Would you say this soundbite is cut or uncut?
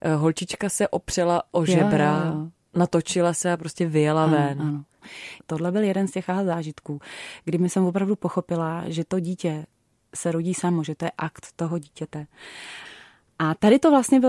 uncut